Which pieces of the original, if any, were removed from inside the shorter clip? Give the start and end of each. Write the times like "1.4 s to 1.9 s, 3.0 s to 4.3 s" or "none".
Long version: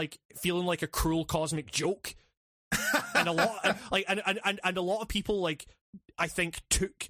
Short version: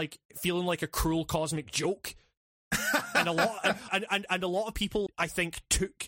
3.9 s to 4.2 s, 5.4 s to 6.1 s